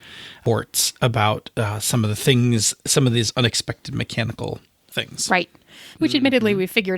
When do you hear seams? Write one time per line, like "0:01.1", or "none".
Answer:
0:05.9

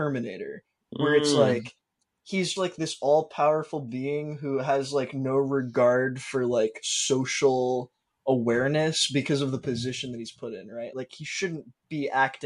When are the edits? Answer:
0:02.6
0:10.9

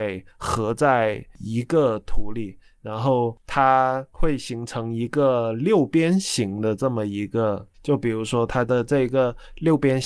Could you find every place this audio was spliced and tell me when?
0:07.7

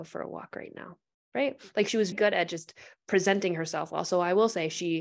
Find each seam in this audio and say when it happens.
0:02.1

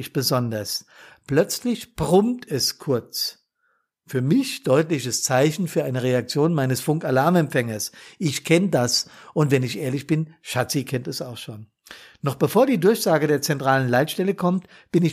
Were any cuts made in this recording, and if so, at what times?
none

